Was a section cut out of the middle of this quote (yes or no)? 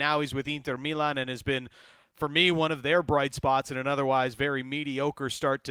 no